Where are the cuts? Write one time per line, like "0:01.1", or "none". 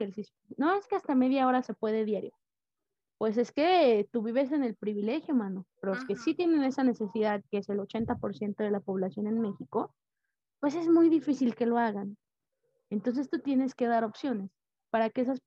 0:05.7